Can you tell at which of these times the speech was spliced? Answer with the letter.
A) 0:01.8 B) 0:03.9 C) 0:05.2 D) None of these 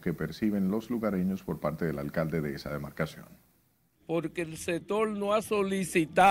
D